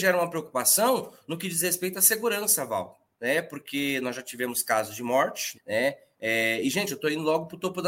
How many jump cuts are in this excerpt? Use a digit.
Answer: 2